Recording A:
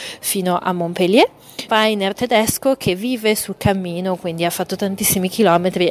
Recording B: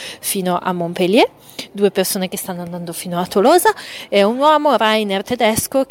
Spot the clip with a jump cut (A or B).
A